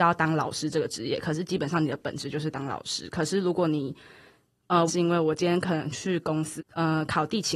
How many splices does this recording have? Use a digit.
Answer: 2